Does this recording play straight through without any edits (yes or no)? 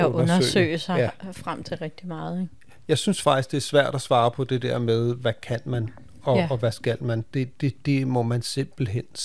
yes